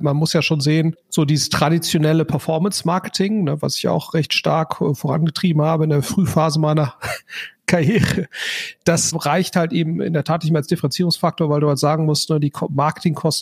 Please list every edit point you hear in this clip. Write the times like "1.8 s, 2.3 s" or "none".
none